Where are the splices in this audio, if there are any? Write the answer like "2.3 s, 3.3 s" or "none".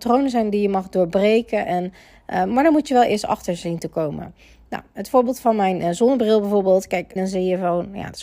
7.2 s